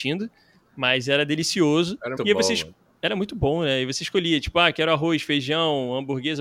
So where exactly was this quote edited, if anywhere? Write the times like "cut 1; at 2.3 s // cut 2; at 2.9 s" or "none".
cut 1; at 2.2 s